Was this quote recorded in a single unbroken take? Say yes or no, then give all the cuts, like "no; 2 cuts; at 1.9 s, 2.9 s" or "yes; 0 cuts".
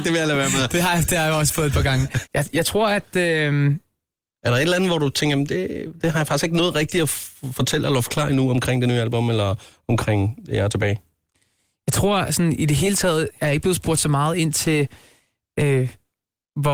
yes; 0 cuts